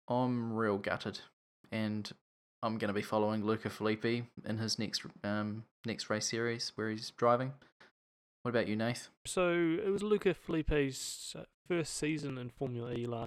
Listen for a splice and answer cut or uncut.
cut